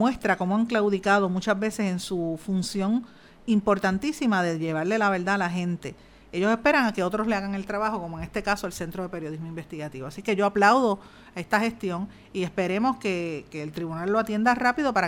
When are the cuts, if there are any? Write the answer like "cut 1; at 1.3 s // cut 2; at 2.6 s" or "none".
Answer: none